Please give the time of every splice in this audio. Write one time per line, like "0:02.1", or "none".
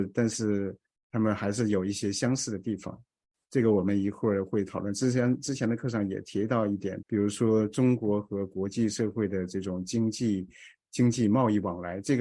0:07.0